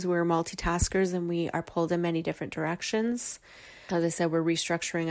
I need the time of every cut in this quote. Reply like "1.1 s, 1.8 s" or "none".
3.9 s